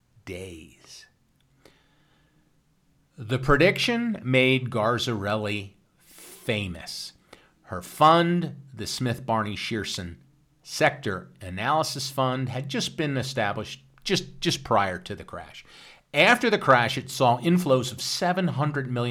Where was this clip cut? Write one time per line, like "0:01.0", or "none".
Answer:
none